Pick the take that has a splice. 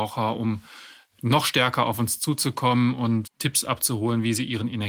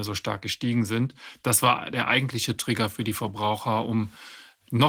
first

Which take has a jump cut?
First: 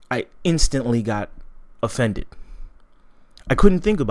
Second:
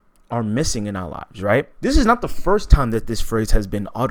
second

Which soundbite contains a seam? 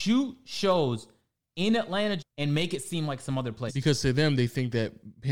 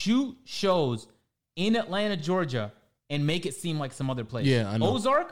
first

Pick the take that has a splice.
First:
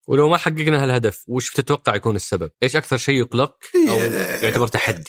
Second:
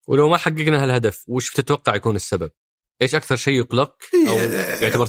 first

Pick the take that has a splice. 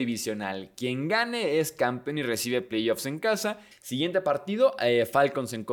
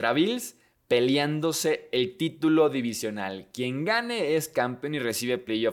first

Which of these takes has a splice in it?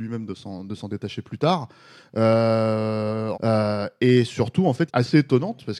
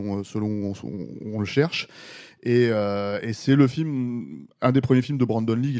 first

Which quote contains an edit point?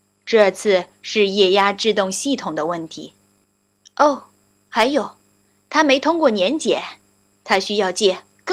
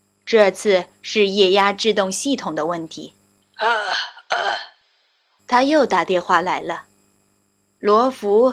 second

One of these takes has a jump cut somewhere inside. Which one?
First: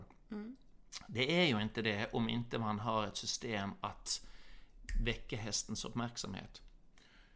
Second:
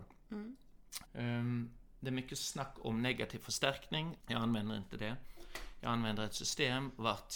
second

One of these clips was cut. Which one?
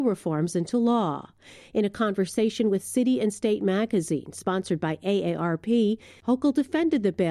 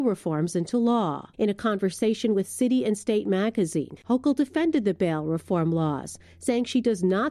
second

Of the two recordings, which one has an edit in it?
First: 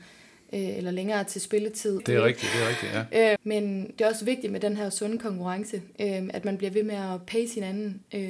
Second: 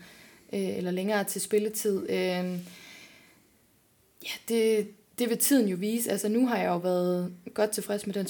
first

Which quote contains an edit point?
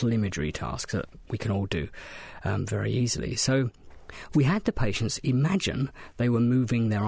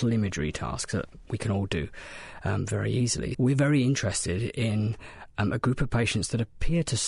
second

